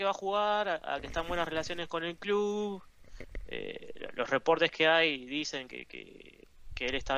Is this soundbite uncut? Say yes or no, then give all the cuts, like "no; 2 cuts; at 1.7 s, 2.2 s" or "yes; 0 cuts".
yes; 0 cuts